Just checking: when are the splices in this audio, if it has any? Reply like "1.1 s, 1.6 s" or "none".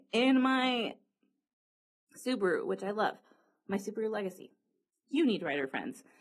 5.0 s